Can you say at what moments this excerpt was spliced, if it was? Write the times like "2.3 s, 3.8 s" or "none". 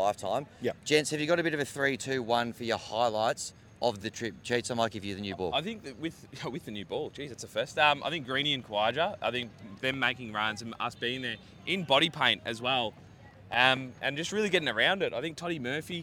none